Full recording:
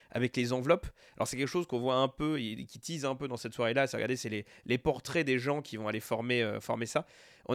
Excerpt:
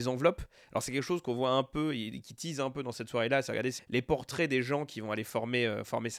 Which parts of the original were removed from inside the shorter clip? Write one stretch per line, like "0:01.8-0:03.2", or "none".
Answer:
0:04.2-0:04.5